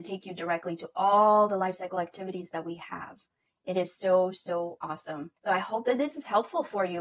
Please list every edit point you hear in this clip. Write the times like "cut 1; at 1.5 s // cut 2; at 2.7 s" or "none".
cut 1; at 5.4 s